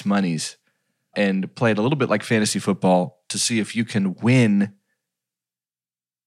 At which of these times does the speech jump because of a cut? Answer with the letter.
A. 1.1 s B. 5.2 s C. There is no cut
A